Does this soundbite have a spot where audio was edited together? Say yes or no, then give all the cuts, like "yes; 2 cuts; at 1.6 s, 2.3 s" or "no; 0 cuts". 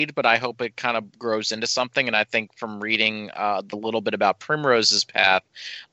no; 0 cuts